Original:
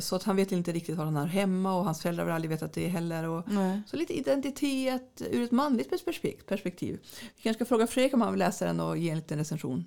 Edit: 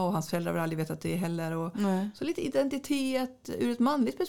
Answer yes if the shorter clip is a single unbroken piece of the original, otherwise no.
yes